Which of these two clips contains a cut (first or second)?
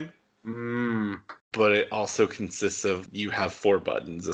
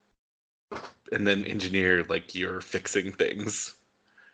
first